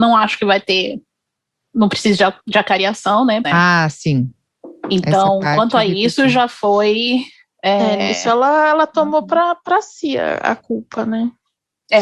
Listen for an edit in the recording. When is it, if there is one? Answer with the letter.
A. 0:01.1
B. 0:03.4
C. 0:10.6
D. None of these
B